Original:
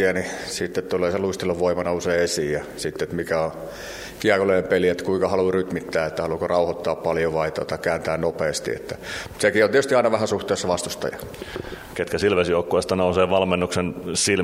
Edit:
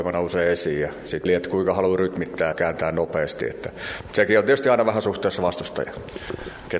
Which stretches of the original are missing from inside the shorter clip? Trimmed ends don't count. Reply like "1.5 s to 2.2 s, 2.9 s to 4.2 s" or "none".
3.0 s to 4.8 s, 6.1 s to 7.8 s